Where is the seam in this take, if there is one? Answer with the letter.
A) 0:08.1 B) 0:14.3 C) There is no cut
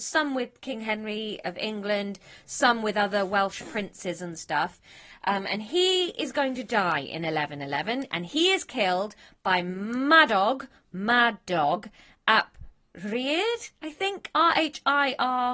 C